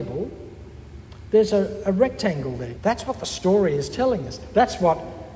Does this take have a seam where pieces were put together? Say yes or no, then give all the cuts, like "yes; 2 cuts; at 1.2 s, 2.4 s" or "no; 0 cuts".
yes; 1 cut; at 2.8 s